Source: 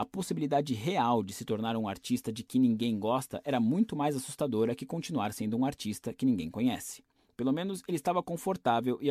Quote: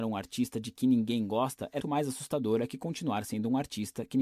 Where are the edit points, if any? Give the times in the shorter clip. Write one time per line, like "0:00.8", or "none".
0:01.8